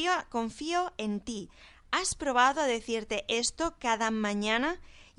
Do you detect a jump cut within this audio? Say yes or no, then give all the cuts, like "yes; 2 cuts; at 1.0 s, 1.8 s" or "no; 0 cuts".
no; 0 cuts